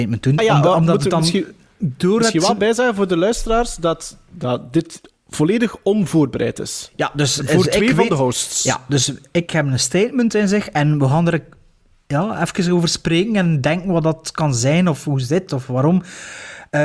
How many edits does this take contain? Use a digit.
0